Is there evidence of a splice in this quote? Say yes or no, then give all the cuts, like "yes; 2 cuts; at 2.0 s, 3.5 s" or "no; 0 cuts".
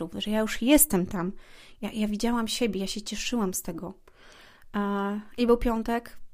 no; 0 cuts